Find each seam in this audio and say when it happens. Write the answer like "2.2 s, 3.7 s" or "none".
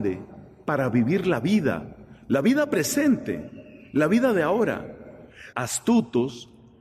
5.5 s